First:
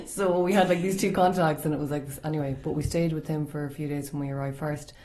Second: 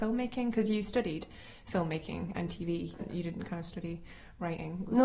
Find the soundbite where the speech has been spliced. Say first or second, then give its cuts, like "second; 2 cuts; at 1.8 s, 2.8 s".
second; 1 cut; at 3.0 s